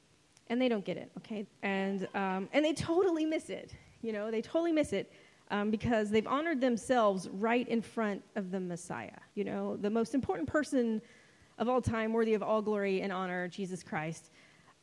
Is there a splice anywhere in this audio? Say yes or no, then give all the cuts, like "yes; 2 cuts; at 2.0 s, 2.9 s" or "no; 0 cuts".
yes; 2 cuts; at 1.4 s, 9.3 s